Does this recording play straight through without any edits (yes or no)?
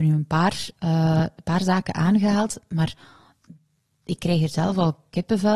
yes